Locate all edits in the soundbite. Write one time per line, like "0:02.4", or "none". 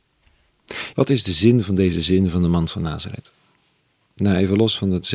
0:00.9